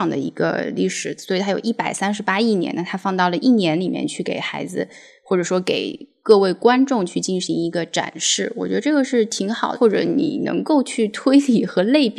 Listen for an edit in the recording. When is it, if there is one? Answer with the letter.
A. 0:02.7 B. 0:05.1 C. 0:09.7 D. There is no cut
C